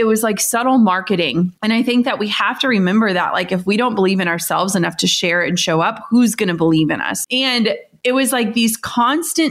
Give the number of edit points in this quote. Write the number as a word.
two